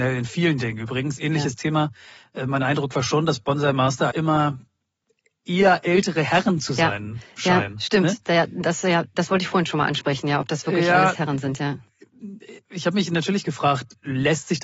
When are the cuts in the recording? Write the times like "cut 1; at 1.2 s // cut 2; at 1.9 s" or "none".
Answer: cut 1; at 4.1 s

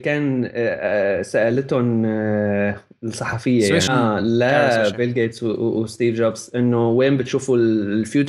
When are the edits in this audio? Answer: cut 1; at 3.9 s

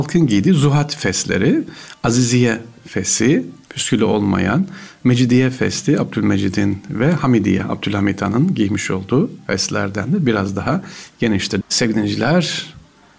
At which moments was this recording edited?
cut 1; at 3.7 s // cut 2; at 11.6 s

